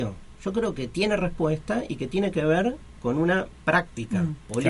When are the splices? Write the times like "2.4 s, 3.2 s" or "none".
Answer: none

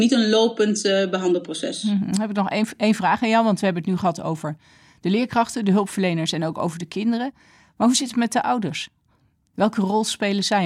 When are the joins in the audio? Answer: none

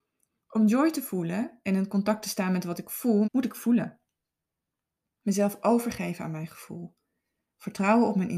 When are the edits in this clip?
3.2 s

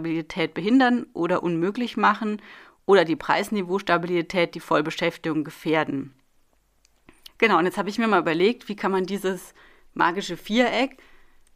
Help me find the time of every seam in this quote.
7.3 s

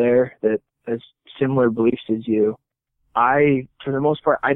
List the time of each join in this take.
none

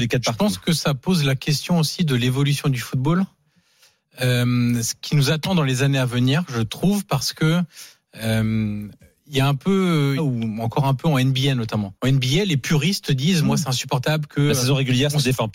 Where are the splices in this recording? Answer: 10.2 s, 12.0 s

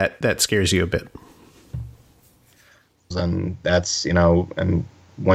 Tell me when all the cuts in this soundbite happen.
3.1 s

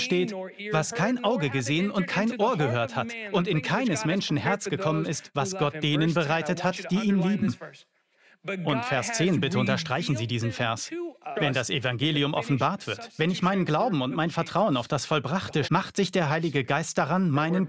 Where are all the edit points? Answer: 11.3 s, 15.6 s

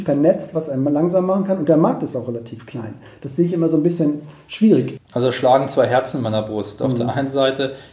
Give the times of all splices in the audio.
5.0 s

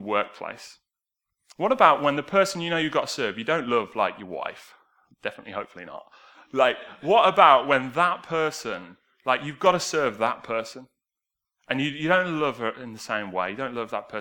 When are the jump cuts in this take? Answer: none

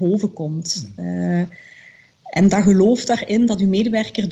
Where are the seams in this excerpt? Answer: none

